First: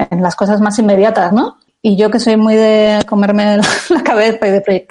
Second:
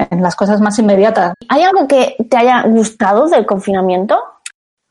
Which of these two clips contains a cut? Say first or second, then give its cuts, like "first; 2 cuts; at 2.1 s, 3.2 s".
second; 1 cut; at 1.3 s